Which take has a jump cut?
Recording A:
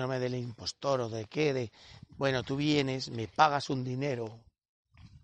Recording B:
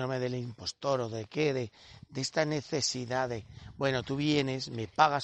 A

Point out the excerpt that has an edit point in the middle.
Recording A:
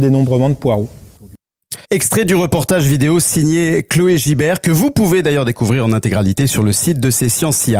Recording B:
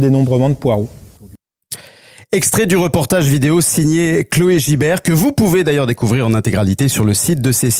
A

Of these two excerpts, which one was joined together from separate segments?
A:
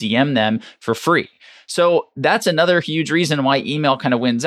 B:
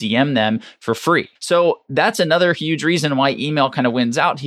B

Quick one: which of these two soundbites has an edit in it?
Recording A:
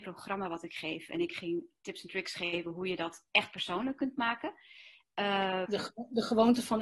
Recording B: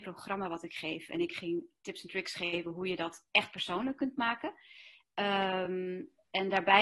A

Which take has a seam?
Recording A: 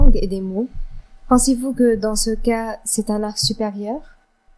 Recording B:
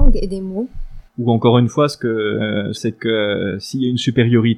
B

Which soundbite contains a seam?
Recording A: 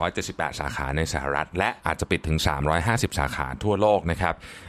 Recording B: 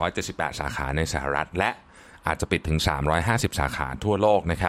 A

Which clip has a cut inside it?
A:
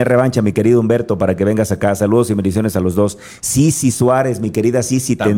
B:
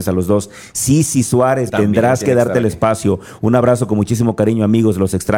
B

